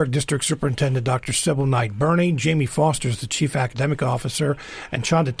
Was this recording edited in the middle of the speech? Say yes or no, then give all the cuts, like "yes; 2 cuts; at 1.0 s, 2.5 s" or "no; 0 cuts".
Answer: no; 0 cuts